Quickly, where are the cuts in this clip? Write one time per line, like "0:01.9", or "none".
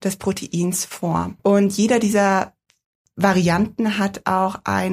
0:01.4